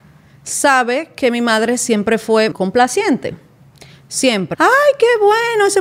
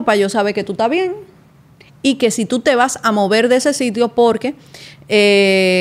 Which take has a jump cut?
first; 2 cuts; at 2.5 s, 4.5 s

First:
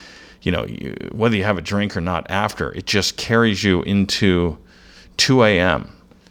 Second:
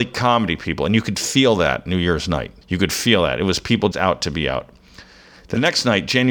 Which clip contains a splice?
second; 2 cuts; at 2.6 s, 3.9 s

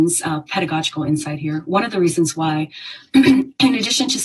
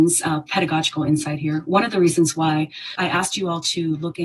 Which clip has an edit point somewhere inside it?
second; 1 cut; at 3.0 s

